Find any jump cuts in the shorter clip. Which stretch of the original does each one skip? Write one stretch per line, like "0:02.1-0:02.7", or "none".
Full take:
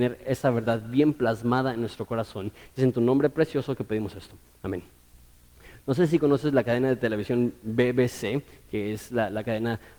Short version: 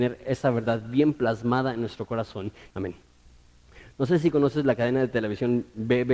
0:02.7-0:04.6